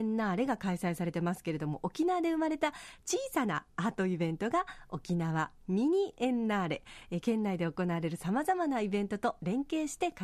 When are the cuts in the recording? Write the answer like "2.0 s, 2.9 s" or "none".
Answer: none

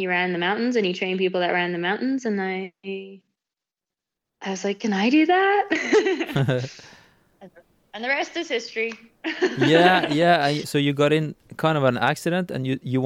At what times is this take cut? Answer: 10.6 s

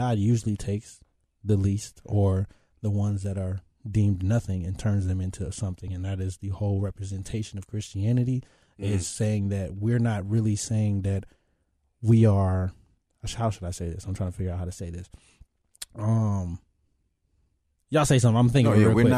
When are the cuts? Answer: none

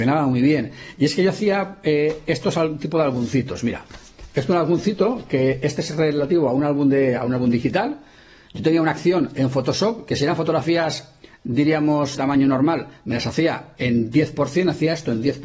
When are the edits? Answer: 12.1 s

